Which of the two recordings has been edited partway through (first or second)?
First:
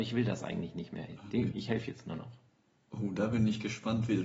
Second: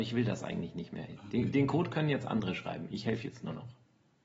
first